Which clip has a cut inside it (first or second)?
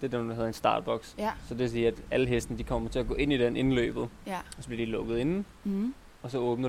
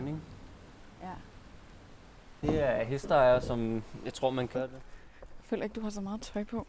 second